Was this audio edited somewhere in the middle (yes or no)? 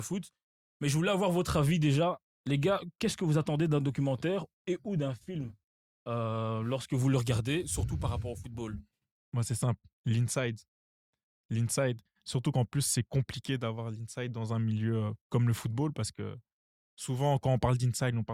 no